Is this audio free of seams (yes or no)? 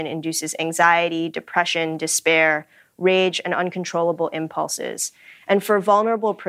yes